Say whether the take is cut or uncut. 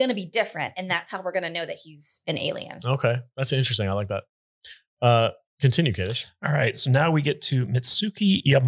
uncut